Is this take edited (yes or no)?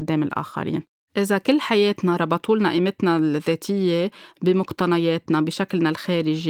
yes